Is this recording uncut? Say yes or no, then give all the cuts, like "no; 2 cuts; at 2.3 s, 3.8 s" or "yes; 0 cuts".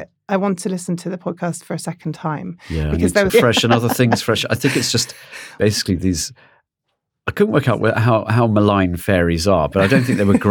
no; 1 cut; at 3.3 s